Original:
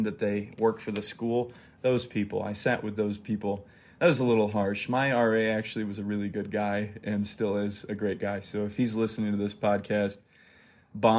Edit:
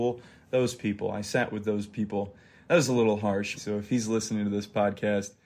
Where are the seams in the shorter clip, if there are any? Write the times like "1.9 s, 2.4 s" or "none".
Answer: 3.6 s